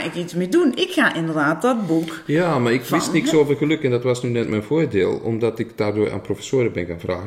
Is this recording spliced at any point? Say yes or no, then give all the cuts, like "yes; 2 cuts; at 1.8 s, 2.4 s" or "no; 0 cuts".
no; 0 cuts